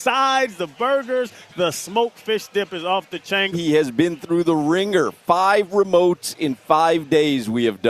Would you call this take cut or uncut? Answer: cut